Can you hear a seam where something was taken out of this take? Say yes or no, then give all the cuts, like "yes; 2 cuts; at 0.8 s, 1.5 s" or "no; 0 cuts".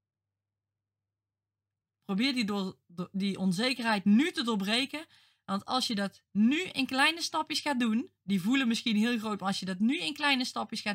no; 0 cuts